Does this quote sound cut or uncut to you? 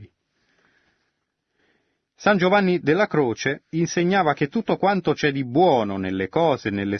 uncut